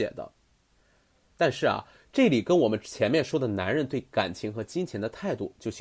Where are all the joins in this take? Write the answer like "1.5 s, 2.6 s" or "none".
none